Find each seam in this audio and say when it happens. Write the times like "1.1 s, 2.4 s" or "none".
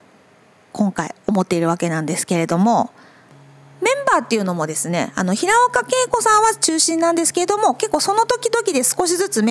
none